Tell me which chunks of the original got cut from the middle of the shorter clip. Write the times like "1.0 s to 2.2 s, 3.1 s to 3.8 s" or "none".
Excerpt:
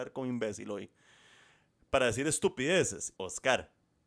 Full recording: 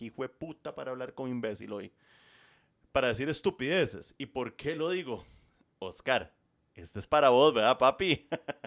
4.2 s to 5.8 s